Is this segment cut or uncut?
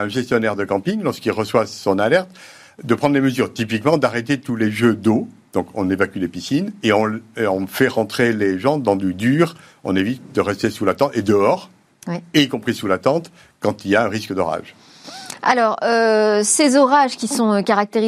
uncut